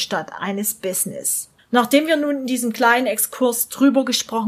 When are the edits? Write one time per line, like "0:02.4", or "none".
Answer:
0:01.6